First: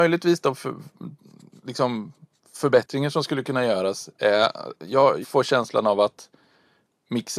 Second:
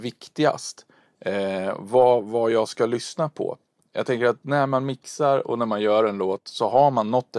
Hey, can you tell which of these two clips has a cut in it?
first; 1 cut; at 5.2 s

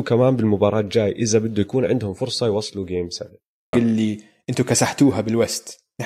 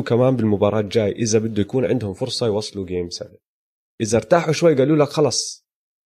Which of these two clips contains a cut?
first; 1 cut; at 3.7 s

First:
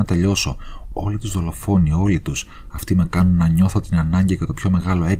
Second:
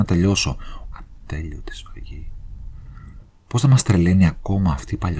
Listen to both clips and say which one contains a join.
second; 2 cuts; at 0.9 s, 3.3 s

